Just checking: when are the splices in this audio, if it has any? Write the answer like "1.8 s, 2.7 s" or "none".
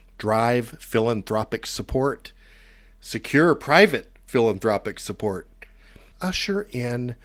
6.1 s